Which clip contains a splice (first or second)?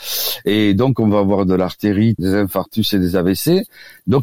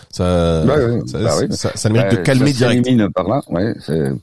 first